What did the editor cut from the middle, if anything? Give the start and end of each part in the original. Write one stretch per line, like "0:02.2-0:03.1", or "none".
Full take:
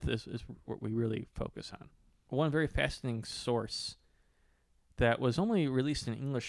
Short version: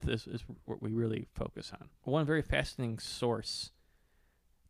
0:02.0-0:02.2